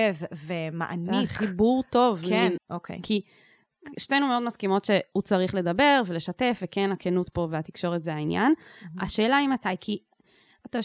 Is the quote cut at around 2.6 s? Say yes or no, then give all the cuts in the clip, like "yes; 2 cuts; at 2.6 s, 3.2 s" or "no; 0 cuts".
yes; 1 cut; at 2.6 s